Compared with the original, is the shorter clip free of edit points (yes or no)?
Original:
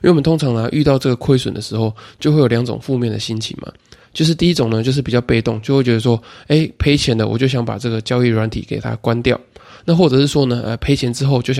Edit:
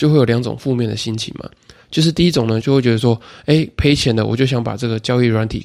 no